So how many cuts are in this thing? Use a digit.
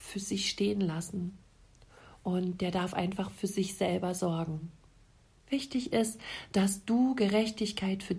1